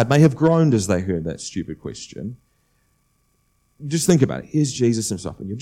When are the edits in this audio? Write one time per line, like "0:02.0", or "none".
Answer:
none